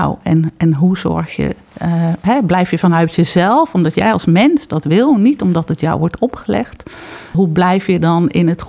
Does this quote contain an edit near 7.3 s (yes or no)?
yes